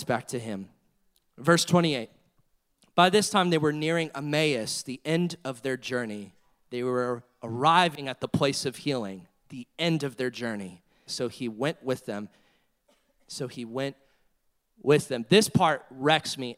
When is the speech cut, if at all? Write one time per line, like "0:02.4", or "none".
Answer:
0:11.1